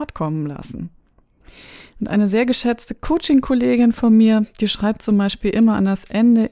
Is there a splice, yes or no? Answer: no